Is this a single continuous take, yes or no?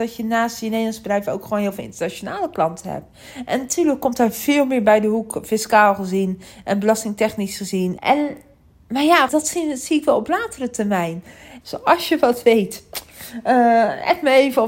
no